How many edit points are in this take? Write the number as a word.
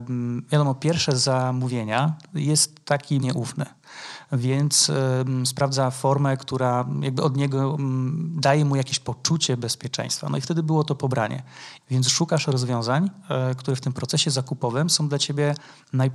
two